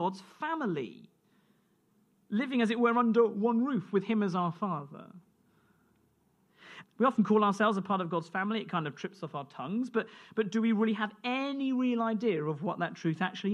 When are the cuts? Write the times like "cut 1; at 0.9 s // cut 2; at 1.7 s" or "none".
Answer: cut 1; at 6.8 s